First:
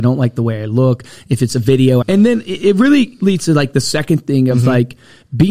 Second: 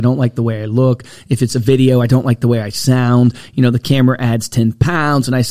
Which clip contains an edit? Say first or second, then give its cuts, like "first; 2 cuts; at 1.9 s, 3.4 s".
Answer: first; 1 cut; at 2.0 s